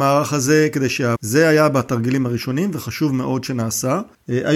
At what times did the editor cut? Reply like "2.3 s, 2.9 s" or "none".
1.2 s